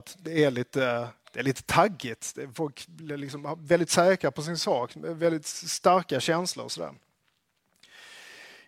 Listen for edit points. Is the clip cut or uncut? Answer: uncut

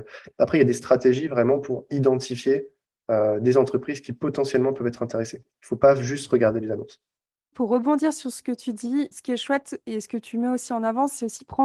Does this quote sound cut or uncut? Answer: cut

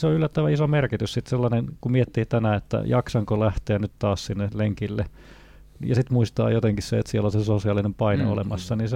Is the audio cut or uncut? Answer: uncut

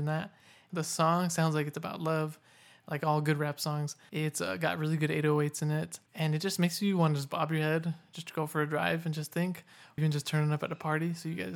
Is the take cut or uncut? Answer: cut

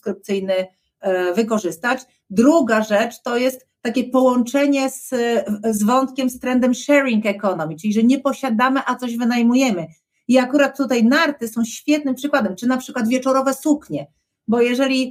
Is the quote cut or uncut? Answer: uncut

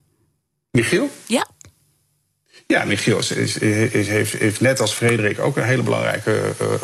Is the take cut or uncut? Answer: uncut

